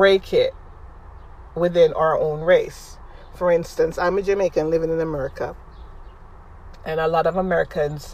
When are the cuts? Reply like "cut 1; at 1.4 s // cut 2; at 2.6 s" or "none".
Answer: none